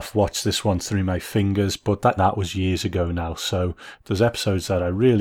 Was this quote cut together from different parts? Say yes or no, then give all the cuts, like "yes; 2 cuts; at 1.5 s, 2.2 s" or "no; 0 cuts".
yes; 1 cut; at 2.2 s